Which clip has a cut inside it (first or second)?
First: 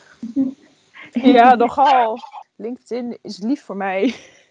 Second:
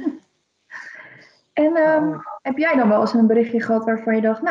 first